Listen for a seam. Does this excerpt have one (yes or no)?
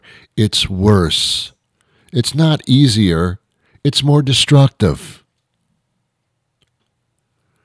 no